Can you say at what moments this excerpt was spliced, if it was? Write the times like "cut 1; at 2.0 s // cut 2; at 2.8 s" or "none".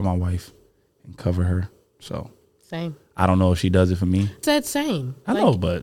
cut 1; at 4.4 s